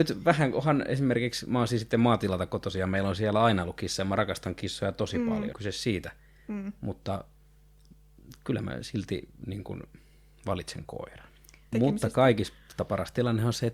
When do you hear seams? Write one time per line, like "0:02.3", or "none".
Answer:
0:05.5
0:11.7